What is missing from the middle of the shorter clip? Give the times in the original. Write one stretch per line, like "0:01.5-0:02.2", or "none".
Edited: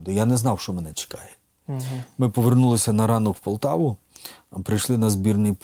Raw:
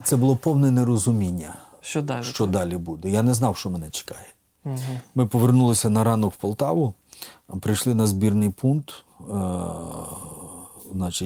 none